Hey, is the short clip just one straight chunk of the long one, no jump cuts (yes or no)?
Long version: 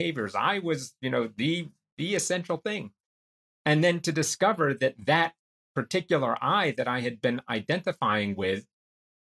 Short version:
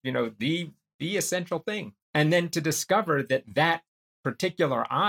no